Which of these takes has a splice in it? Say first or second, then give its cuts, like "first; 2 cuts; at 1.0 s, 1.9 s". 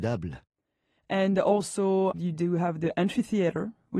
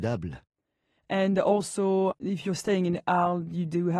first; 1 cut; at 2.1 s